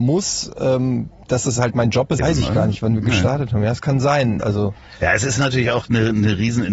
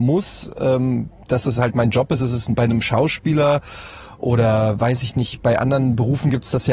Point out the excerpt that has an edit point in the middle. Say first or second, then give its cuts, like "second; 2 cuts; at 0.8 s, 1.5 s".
first; 2 cuts; at 2.2 s, 4.4 s